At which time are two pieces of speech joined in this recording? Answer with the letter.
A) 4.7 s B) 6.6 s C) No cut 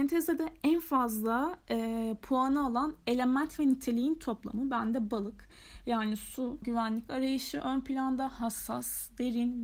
B